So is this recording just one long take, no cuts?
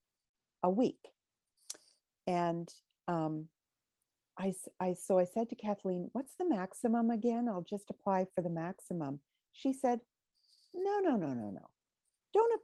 yes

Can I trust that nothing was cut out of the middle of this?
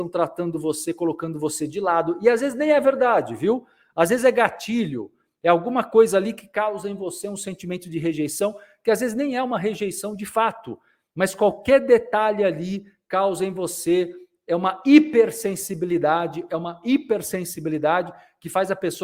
yes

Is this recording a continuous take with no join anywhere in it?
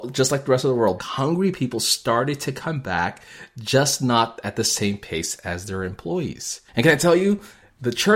no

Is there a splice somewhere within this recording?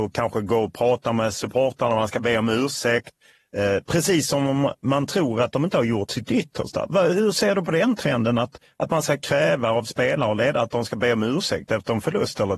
no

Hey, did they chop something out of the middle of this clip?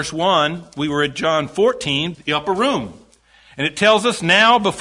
yes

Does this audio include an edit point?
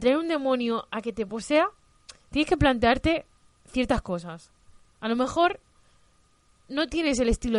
no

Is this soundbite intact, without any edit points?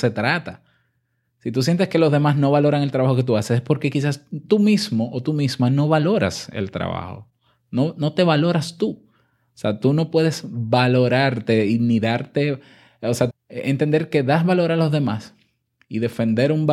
no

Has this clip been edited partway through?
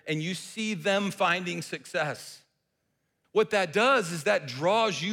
yes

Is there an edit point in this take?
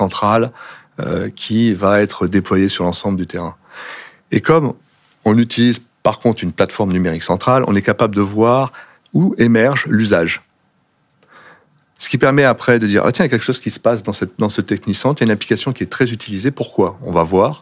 no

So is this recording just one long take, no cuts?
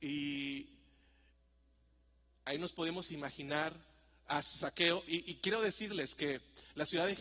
yes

